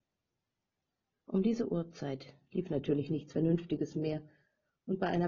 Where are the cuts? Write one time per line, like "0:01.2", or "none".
none